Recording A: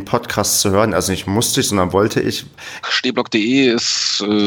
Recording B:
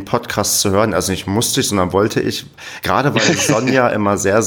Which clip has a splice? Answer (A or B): A